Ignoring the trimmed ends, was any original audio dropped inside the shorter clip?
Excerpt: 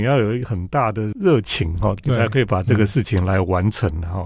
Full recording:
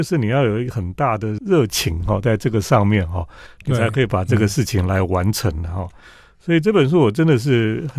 yes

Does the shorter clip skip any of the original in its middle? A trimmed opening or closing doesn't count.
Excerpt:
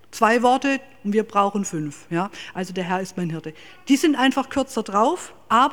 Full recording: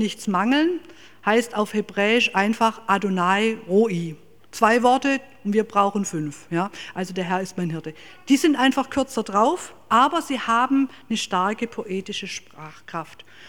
no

